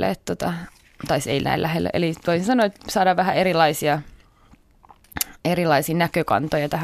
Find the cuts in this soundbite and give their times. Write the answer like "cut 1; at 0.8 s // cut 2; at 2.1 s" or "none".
none